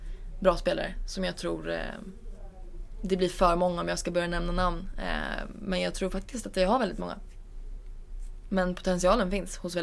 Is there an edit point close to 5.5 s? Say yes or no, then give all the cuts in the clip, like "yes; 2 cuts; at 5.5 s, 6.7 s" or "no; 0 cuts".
no; 1 cut; at 8.5 s